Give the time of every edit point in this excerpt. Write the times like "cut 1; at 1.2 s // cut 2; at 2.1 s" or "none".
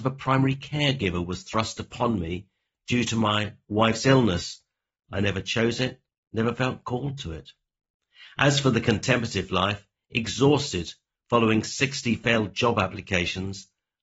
none